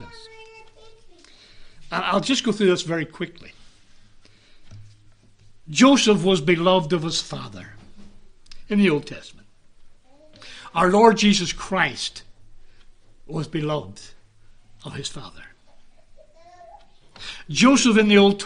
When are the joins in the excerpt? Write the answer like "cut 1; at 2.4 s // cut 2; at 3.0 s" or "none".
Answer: cut 1; at 5.6 s